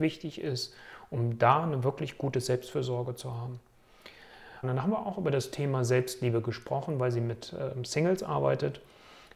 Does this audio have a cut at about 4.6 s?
yes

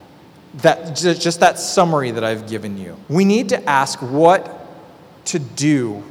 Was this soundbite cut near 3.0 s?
yes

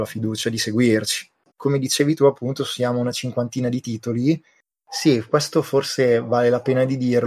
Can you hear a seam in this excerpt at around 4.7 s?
yes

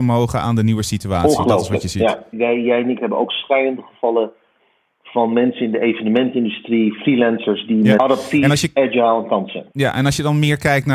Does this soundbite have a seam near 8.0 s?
yes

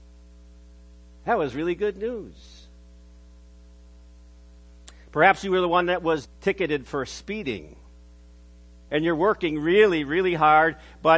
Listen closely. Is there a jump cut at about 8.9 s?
yes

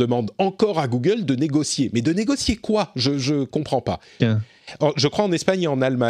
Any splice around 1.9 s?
no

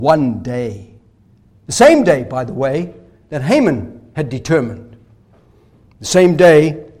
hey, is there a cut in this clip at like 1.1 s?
no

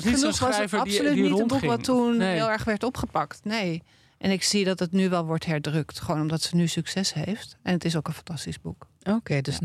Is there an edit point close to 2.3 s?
no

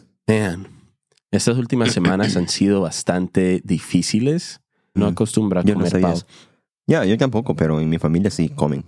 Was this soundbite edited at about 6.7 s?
no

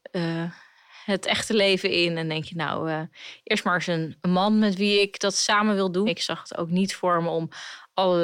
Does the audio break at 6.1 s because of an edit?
yes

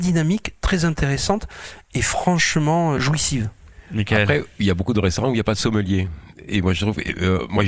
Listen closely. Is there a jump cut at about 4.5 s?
no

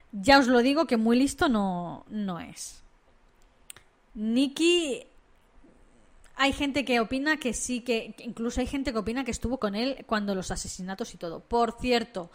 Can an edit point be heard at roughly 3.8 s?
no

